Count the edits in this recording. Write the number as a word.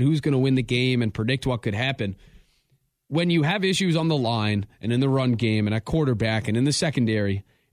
zero